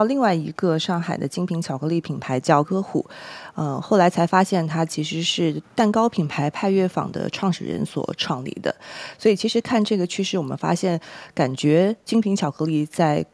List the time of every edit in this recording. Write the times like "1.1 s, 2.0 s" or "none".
2.6 s